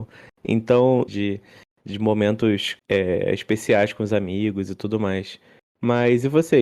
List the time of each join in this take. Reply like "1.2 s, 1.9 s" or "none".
1.1 s, 2.8 s